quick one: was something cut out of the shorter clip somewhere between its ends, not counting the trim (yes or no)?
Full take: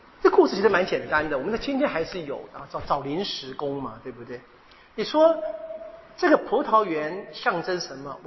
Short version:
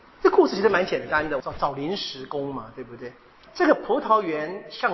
yes